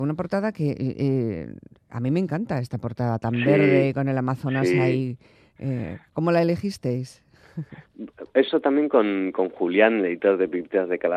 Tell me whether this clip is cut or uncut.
uncut